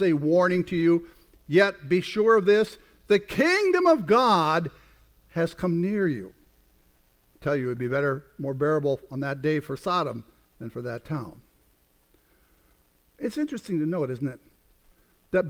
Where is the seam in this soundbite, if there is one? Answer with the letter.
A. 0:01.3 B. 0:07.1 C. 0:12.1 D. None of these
D